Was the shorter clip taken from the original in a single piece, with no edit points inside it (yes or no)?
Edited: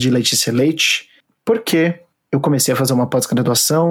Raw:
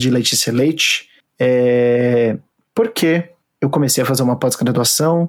no